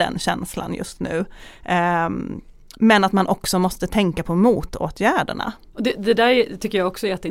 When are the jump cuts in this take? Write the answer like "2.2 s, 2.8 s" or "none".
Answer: 5.7 s